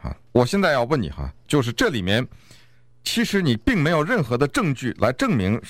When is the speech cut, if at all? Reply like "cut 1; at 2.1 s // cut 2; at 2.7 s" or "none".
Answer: none